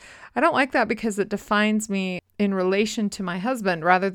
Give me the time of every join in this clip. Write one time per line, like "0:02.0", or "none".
0:02.3